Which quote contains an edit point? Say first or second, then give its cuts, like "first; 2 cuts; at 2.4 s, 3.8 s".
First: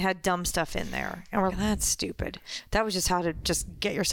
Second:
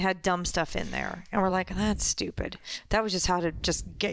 first; 1 cut; at 1.5 s